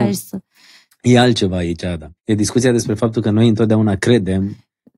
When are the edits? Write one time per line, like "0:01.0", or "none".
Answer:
0:02.2

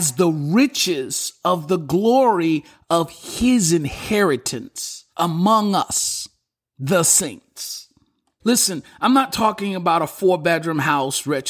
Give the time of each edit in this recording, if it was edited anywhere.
0:05.1
0:08.4

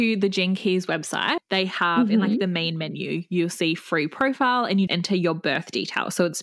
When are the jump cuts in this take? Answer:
0:01.4
0:04.9

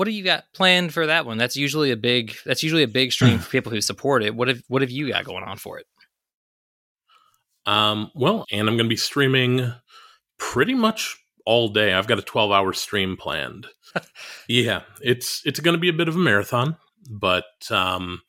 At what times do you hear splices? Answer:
0:08.4
0:13.9

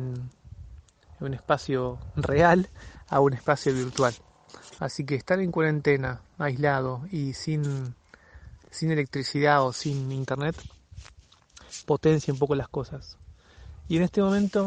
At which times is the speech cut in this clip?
0:04.8

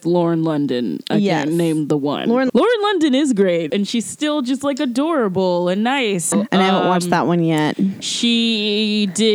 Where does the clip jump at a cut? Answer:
0:02.5
0:03.7
0:06.3

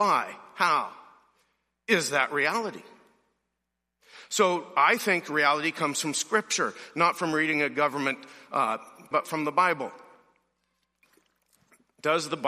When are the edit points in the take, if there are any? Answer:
0:09.1

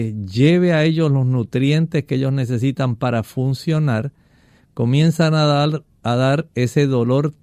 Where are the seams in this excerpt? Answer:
none

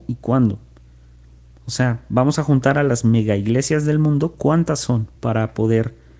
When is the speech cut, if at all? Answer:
0:05.2

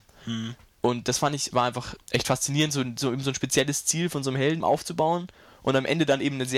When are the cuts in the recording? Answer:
0:02.0
0:04.6

